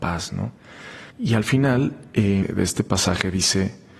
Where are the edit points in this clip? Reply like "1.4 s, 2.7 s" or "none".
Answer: 1.1 s, 2.4 s